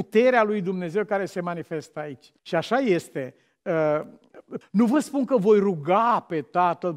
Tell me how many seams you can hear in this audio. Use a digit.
2